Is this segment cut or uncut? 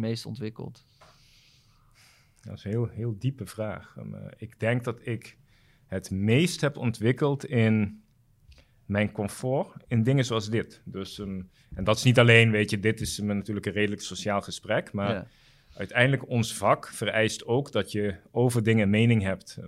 uncut